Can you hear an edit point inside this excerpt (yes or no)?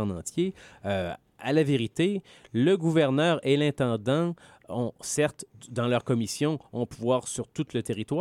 no